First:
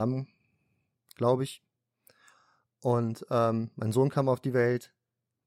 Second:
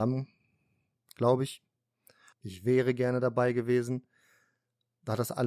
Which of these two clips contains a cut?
second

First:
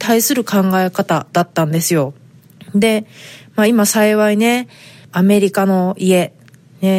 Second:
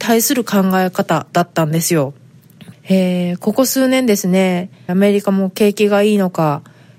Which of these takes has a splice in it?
second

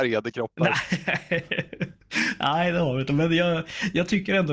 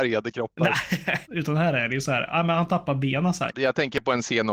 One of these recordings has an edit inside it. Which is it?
second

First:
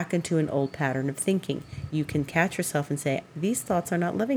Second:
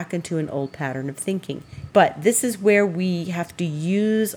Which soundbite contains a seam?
second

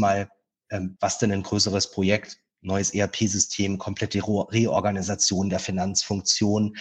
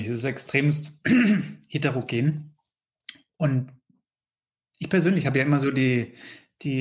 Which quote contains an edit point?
first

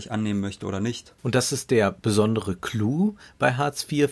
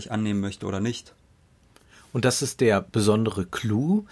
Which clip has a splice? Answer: first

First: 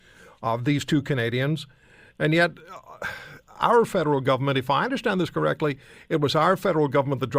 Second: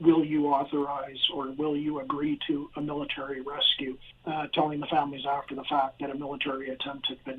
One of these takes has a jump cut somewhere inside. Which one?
second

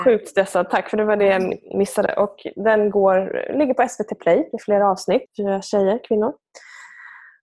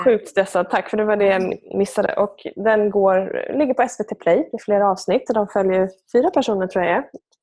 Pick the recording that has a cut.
first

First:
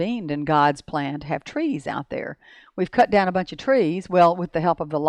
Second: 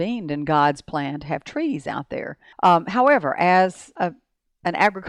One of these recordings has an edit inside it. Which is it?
second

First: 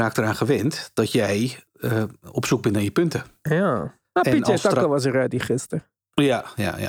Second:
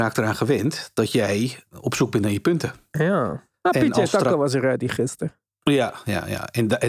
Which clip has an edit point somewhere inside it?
second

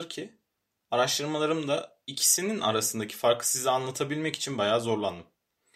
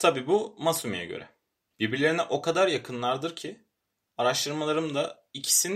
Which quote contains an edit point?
second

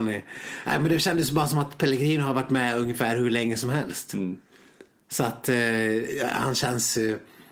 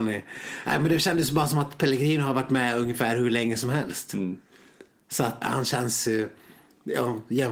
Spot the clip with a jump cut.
second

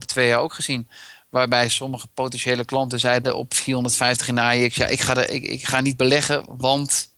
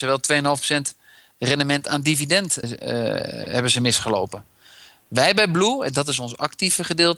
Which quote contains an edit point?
second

